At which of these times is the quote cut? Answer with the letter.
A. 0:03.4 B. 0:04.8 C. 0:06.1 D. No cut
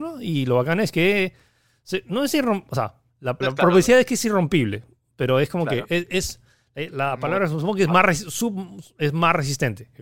A